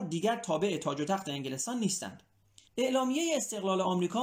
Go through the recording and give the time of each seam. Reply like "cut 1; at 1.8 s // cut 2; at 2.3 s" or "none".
cut 1; at 2.6 s